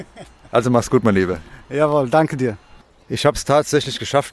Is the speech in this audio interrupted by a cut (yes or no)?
no